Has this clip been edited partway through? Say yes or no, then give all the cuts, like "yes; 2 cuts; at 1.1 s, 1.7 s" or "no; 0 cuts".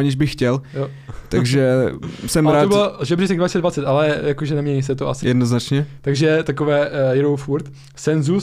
yes; 1 cut; at 5.2 s